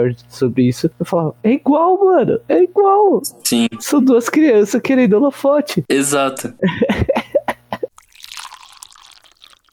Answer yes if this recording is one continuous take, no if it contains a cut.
yes